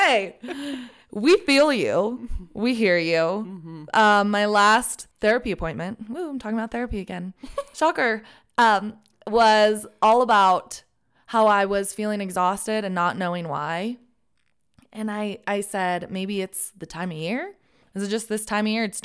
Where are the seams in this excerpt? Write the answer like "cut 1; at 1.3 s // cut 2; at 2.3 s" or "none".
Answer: cut 1; at 5.1 s